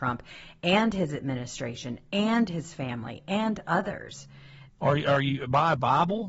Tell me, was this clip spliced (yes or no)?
yes